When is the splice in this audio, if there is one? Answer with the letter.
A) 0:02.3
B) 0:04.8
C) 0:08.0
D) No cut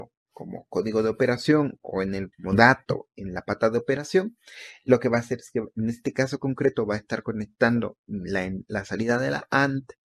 A